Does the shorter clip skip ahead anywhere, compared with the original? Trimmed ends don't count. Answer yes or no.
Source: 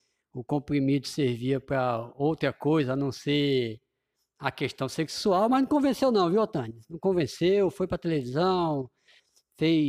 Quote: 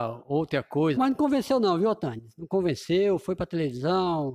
yes